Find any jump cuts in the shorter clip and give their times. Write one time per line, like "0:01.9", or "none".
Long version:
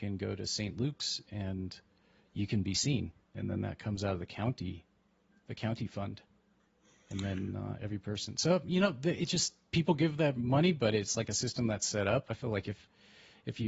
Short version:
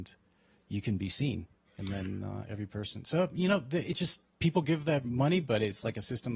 0:01.6

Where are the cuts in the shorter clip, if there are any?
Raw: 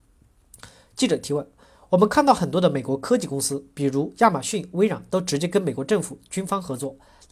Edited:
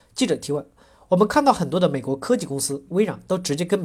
0:02.9

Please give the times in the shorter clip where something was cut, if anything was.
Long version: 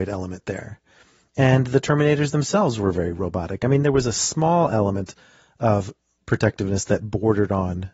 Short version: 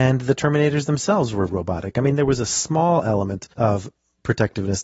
0:01.5
0:03.5

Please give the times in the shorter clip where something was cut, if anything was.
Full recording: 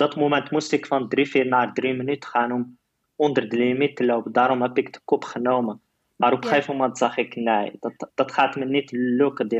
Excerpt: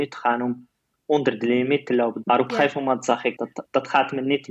0:02.2
0:03.4

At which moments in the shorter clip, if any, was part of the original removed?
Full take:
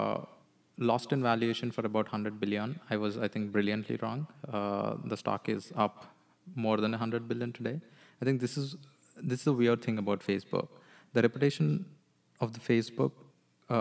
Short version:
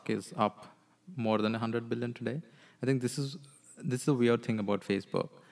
none

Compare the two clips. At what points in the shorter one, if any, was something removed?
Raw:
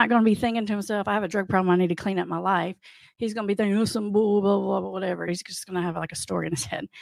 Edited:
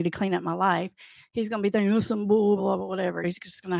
0:02.6

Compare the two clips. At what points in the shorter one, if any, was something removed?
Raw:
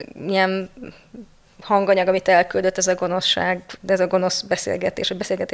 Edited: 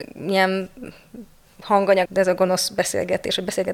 0:02.1

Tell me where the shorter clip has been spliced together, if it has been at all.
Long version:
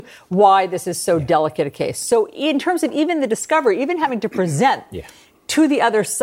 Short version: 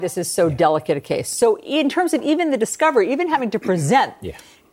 none

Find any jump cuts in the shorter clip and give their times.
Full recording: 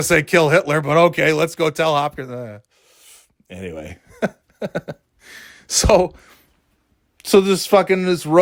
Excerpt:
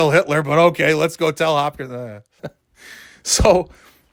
0:02.4

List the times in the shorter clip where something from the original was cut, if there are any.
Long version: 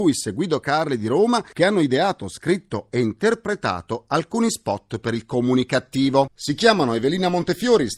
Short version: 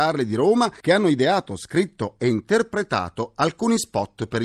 none

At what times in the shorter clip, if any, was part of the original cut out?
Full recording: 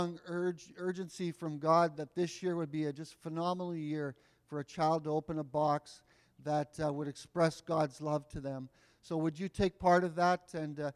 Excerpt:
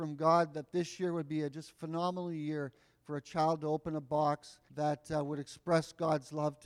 0:04.7

